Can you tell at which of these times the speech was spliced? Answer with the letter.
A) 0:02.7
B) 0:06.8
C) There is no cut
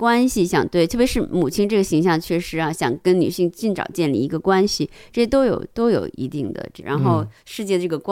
B